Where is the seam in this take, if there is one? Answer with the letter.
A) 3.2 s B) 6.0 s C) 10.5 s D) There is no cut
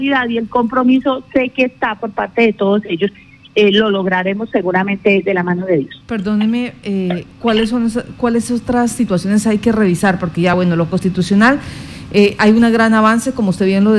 D